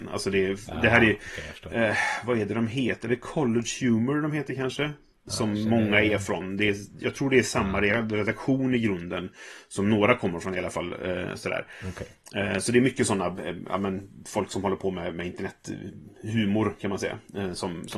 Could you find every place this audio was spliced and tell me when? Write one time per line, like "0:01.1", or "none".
none